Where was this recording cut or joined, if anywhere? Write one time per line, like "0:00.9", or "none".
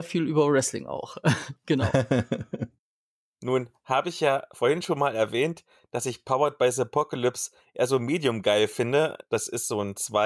none